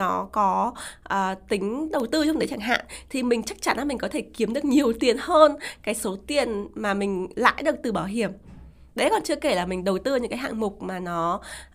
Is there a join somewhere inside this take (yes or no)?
no